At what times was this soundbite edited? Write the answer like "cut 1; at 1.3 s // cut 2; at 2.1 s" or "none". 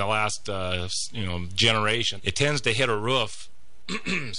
cut 1; at 2.2 s